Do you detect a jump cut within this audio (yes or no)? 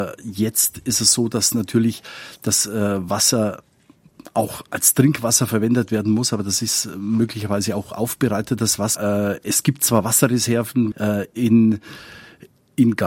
yes